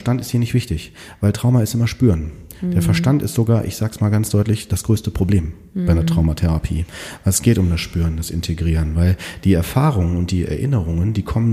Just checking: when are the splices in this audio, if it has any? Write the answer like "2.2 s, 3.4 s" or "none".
none

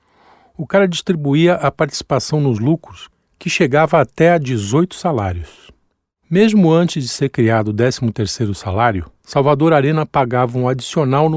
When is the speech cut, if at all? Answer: 6.2 s, 9.2 s

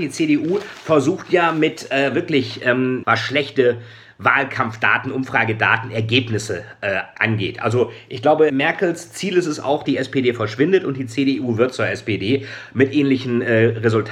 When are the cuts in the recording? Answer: 3.0 s, 8.5 s, 9.8 s

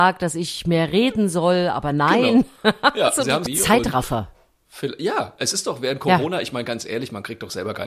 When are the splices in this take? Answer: 3.5 s

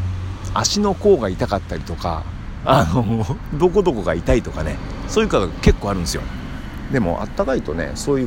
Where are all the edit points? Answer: 3.5 s

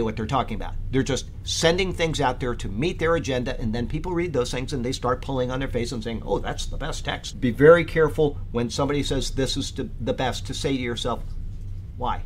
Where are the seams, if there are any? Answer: 7.3 s

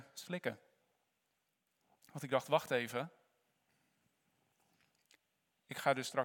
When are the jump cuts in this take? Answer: none

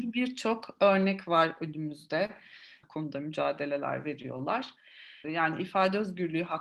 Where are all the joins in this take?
2.8 s, 5.2 s

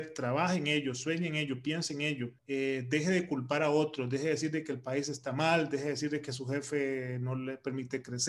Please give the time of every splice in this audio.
2.4 s

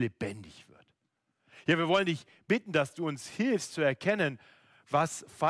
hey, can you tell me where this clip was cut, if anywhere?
none

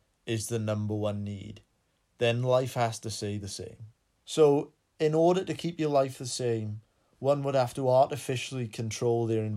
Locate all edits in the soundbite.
4.2 s

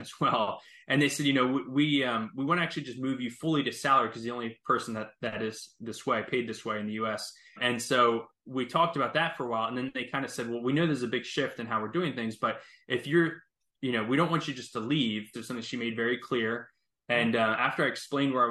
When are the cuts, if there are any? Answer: 15.3 s

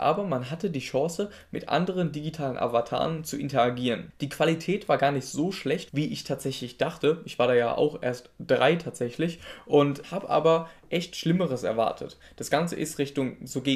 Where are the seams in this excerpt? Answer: 5.9 s, 10.0 s

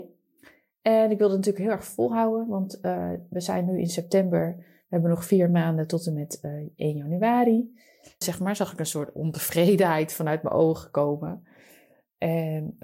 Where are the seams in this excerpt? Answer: 8.2 s

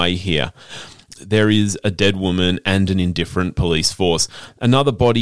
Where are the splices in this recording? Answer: 1.2 s

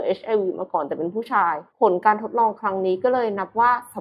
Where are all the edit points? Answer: 1.7 s

